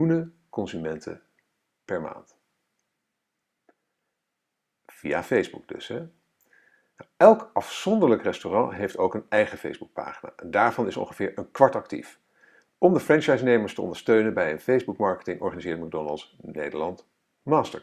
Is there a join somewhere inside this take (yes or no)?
no